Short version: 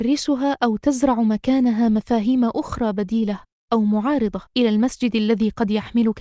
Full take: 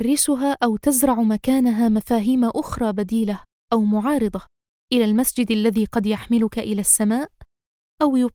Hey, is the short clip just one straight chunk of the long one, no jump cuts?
no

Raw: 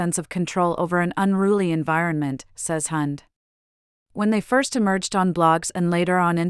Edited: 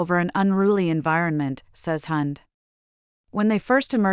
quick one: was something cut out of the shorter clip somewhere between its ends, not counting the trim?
no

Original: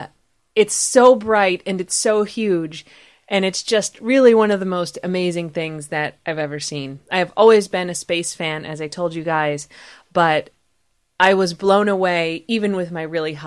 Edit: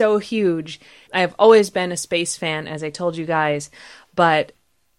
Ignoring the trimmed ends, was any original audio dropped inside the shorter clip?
yes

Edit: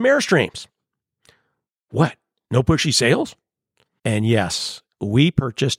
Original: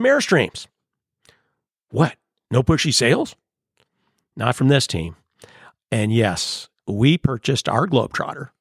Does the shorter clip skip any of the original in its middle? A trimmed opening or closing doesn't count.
yes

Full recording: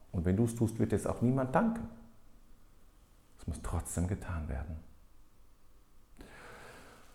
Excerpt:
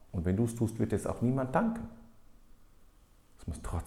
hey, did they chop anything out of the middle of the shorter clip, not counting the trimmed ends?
no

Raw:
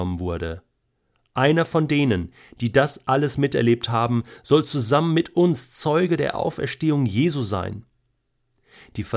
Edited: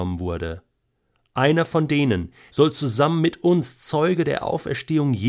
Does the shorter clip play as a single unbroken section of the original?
no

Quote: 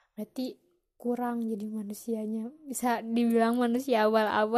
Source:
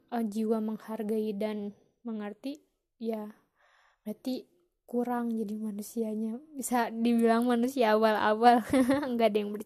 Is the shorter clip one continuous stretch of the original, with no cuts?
yes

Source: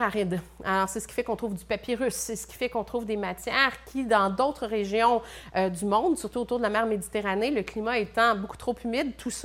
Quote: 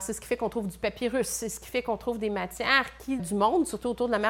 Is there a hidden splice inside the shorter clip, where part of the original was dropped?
yes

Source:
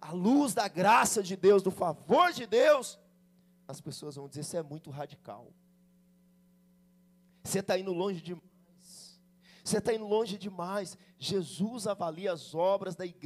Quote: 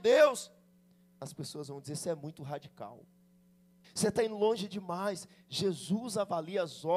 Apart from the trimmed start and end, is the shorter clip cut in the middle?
yes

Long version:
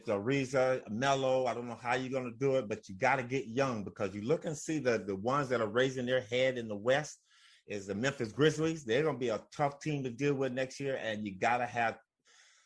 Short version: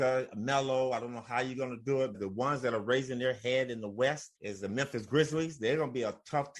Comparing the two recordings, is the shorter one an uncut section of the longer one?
no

